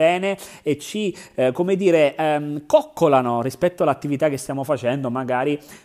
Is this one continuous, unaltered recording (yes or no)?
yes